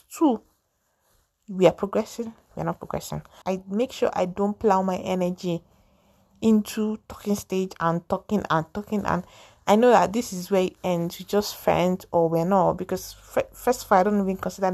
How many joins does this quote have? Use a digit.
1